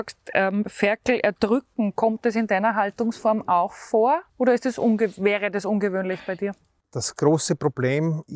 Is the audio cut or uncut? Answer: cut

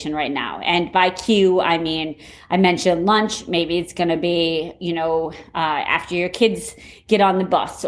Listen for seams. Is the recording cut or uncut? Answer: uncut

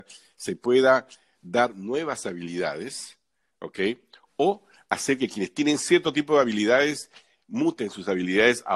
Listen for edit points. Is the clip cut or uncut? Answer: uncut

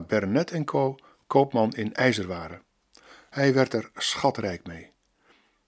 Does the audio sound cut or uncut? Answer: uncut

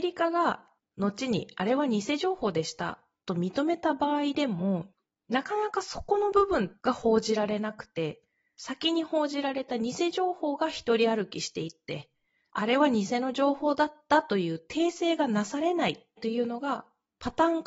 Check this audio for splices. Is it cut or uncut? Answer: uncut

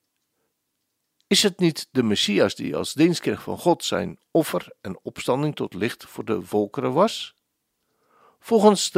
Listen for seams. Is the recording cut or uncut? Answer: uncut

